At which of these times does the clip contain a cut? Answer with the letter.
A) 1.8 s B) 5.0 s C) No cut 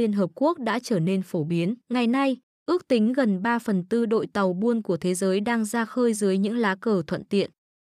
A